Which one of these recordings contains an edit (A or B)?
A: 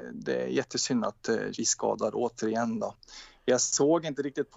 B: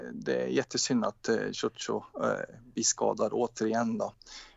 A